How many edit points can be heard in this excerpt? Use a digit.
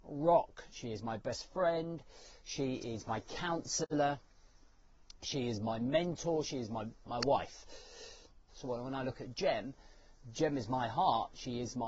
2